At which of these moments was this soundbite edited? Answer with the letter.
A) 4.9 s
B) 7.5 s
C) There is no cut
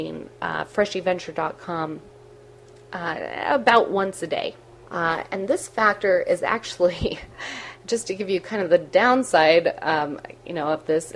A